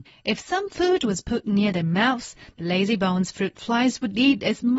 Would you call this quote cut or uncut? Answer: uncut